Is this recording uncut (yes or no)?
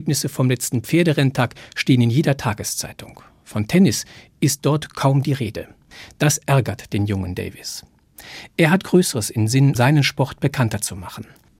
no